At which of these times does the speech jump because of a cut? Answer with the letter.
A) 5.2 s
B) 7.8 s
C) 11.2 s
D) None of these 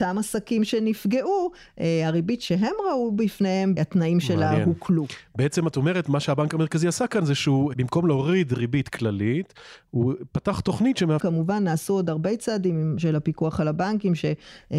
C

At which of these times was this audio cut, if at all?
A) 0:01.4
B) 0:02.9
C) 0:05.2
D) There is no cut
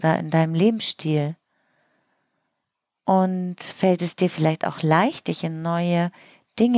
D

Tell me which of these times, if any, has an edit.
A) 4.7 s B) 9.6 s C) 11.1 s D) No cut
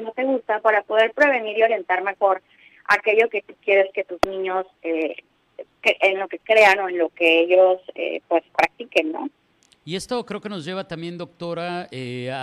D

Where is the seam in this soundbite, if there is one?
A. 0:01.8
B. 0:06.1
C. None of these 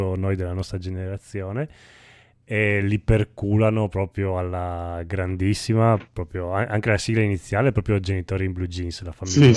C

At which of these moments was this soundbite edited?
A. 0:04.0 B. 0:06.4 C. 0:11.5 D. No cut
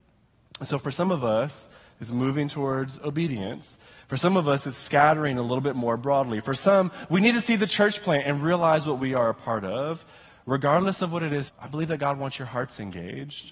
C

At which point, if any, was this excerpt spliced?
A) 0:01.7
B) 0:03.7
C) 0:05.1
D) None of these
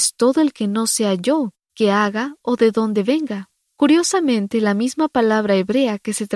A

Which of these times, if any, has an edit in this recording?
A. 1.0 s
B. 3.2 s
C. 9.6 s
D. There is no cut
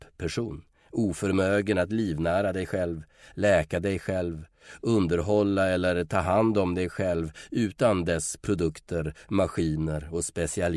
D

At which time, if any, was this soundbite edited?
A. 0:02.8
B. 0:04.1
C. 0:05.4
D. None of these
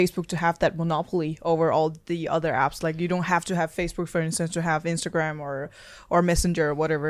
D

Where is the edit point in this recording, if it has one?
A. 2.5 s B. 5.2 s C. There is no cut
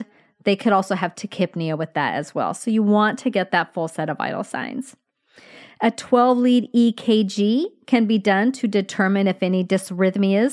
C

